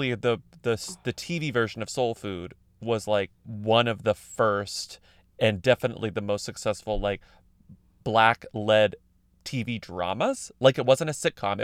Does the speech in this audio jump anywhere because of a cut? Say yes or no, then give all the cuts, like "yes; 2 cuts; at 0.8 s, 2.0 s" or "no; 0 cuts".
yes; 1 cut; at 3.4 s